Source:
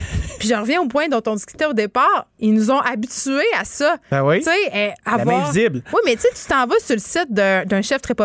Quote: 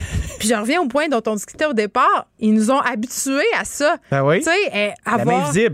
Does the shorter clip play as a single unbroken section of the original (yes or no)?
yes